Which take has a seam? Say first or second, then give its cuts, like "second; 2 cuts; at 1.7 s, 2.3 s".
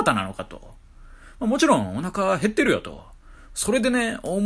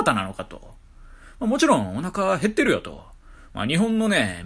first; 1 cut; at 3.5 s